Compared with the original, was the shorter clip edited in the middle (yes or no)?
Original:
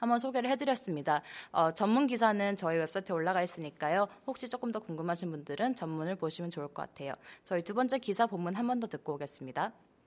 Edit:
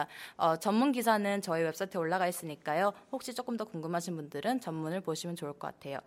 no